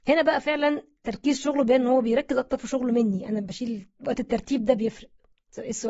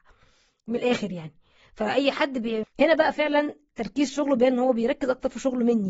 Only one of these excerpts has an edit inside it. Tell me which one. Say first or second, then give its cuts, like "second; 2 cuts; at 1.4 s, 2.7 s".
second; 1 cut; at 2.6 s